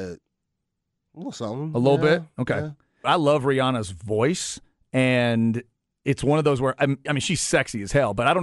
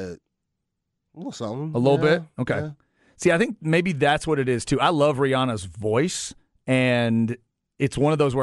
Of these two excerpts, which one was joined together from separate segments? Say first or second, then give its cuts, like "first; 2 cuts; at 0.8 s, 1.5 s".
first; 2 cuts; at 3.0 s, 7.1 s